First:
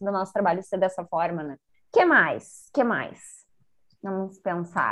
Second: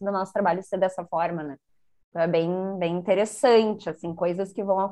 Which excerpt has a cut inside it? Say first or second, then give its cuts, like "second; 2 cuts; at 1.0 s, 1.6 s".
first; 1 cut; at 1.7 s